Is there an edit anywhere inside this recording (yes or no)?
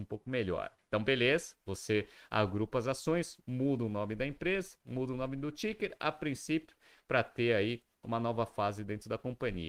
no